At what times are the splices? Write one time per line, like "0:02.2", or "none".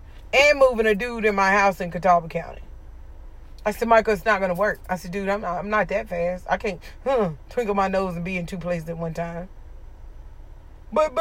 none